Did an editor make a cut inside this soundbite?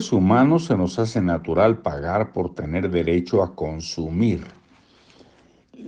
no; 0 cuts

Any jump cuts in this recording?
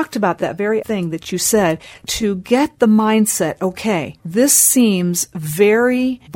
no; 0 cuts

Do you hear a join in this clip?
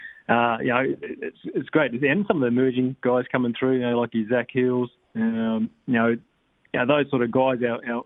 no; 0 cuts

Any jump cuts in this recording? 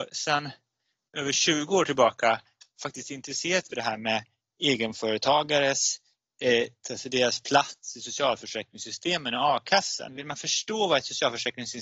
yes; 3 cuts; at 3.7 s, 6.8 s, 10.1 s

